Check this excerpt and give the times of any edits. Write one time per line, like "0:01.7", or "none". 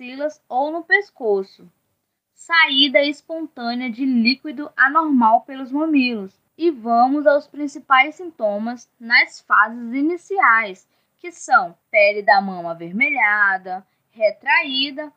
0:06.5
0:11.8